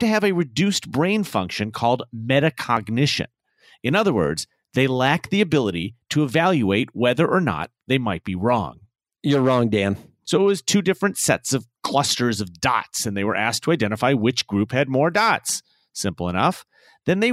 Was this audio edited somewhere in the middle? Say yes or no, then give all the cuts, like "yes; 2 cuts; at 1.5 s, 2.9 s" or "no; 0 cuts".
yes; 1 cut; at 10.3 s